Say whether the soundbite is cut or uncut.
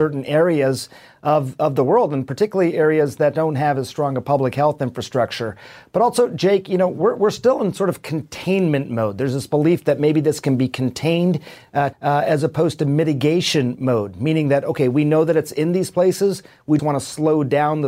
cut